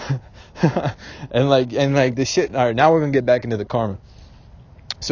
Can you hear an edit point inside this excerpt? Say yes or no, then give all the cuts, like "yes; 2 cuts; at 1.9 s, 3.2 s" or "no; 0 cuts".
no; 0 cuts